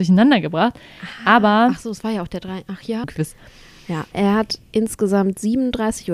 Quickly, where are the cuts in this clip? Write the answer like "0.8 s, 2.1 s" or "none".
3.0 s, 4.1 s